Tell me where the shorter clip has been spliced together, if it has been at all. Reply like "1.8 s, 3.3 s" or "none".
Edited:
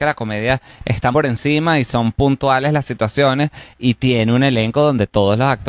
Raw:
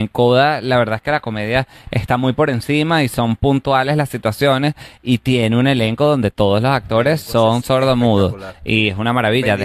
1.1 s